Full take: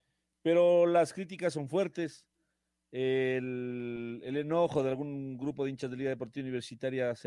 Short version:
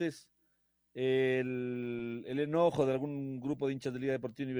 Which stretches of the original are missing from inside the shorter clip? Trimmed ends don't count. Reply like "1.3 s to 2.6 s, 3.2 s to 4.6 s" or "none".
none